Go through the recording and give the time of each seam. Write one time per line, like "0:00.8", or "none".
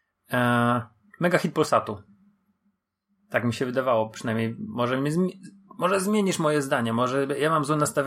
none